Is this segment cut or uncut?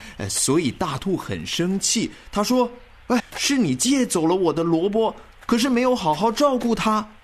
cut